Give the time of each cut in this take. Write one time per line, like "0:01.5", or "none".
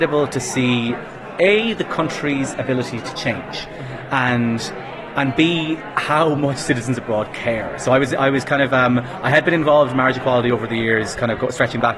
none

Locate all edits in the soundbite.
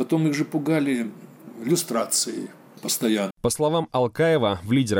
0:03.3

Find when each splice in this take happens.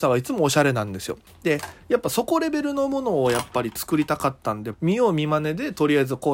0:01.3
0:04.7

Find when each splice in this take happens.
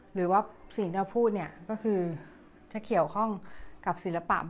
none

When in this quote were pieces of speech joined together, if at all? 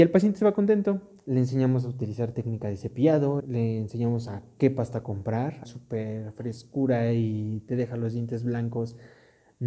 0:03.4
0:05.6

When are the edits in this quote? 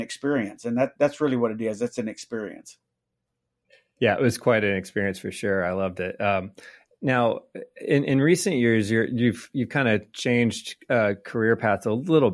none

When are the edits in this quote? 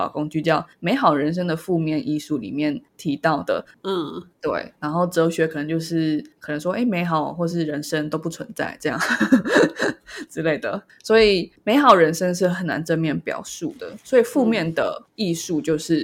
0:03.7

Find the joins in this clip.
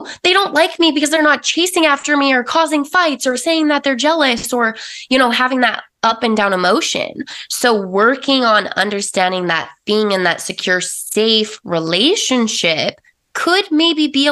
none

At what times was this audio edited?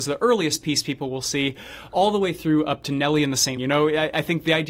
0:03.6

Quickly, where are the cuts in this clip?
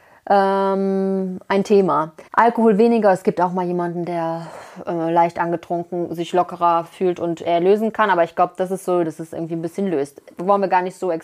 0:02.3
0:09.0

